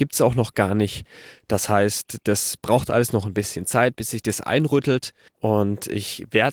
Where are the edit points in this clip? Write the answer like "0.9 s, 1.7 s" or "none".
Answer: 5.3 s